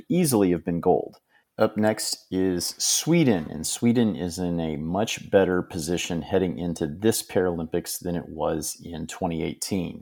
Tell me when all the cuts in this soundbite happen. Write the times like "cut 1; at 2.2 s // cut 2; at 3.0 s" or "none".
cut 1; at 1.4 s